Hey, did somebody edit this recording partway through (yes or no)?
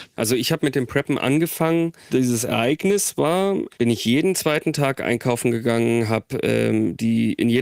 yes